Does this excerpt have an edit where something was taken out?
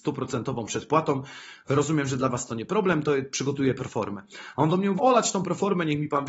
yes; 1 cut; at 5.0 s

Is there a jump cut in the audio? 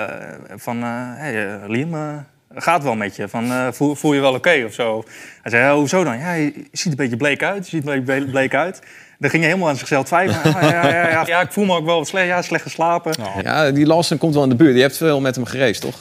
yes; 2 cuts; at 11.3 s, 13.4 s

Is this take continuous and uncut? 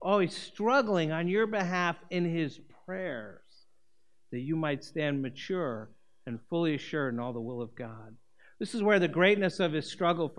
yes; 0 cuts

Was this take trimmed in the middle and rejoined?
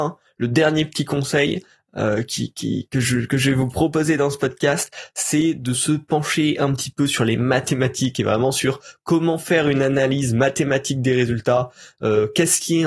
no; 0 cuts

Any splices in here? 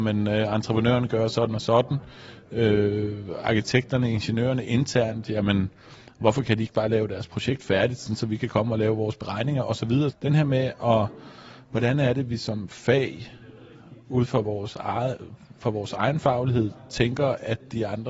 yes; 1 cut; at 10.1 s

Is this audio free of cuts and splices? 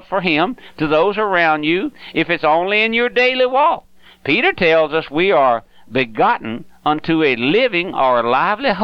yes; 0 cuts

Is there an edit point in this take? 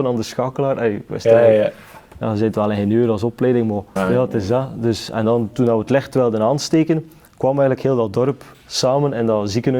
yes; 1 cut; at 4.0 s

